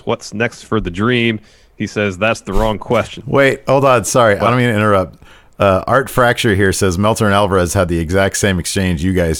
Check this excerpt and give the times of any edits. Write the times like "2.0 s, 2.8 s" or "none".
none